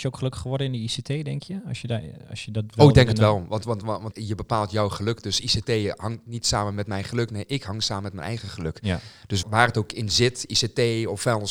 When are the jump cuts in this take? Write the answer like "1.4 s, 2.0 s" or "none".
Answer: 4.1 s, 9.4 s